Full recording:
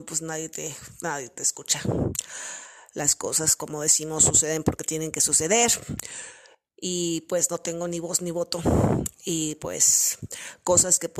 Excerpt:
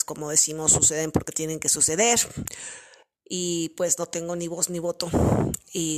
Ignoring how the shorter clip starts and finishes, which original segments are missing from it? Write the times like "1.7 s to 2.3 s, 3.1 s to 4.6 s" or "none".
none

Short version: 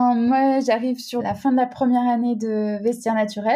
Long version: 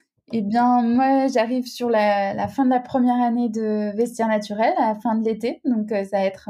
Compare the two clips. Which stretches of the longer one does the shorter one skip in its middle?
1.9 s to 2.3 s

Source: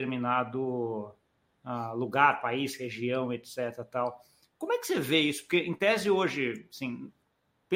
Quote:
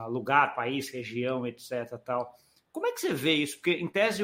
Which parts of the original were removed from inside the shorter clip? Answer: none

